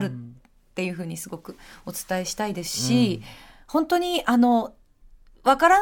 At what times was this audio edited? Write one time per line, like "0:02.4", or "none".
none